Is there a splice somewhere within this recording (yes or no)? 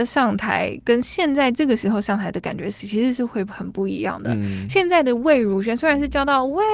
no